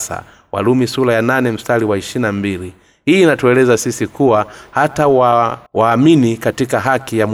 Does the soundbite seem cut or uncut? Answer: cut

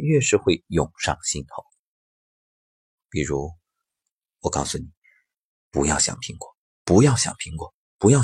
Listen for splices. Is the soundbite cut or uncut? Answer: uncut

